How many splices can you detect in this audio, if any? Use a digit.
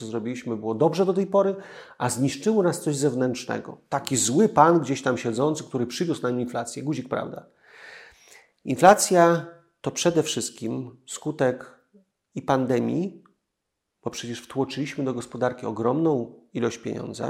0